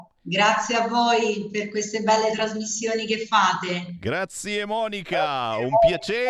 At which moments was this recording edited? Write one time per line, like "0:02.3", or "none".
none